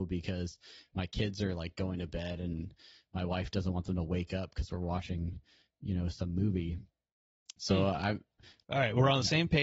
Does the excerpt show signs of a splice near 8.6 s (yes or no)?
yes